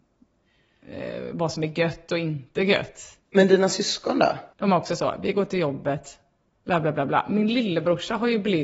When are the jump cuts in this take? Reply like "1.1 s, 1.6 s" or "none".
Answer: 4.5 s

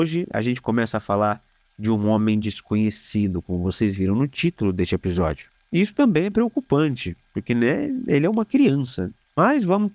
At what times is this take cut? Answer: 5.6 s

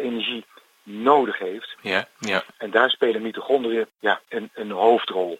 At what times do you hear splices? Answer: 2.2 s

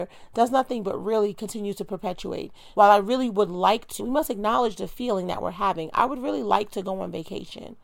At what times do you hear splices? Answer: 2.7 s, 4.0 s

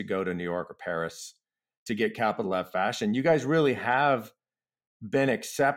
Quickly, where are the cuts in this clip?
none

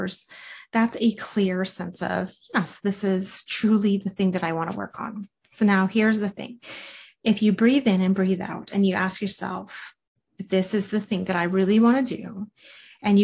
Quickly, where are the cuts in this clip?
none

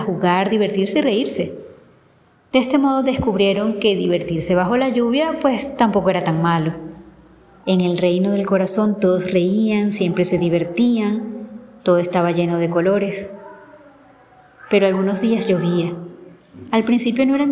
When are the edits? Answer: 7.6 s

